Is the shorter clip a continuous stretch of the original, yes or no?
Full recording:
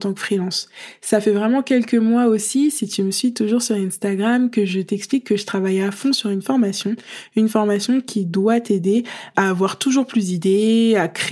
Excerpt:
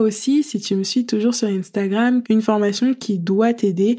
no